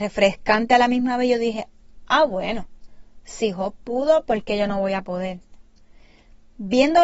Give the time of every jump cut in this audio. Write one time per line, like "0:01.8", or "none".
none